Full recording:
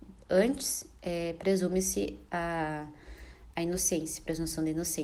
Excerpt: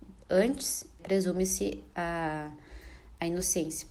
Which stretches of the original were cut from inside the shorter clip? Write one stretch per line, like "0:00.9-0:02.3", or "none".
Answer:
0:01.0-0:01.3

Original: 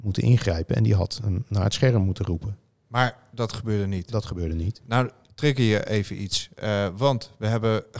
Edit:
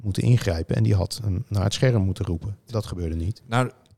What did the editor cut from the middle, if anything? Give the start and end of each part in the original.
0:02.7-0:04.1

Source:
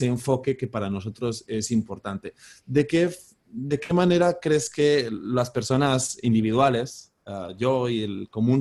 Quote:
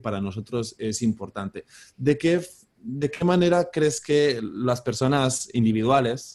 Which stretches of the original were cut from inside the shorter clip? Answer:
none

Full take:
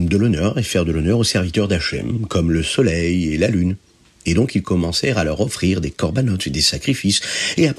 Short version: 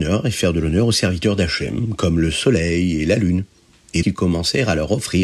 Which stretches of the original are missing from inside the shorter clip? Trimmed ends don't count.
0:04.3-0:04.5

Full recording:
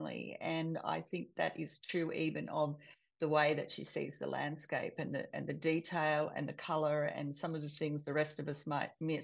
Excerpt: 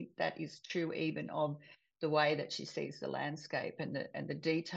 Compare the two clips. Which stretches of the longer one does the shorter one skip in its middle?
none

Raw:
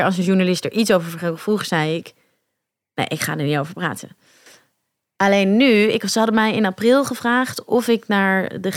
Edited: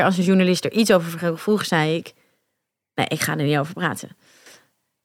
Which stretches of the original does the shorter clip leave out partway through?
none

